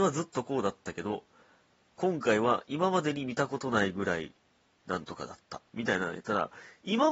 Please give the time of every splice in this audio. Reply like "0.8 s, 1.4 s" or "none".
5.7 s